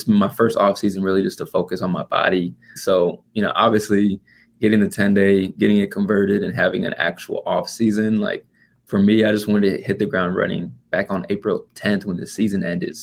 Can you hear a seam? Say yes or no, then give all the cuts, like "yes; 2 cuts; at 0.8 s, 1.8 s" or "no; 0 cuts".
yes; 1 cut; at 2.8 s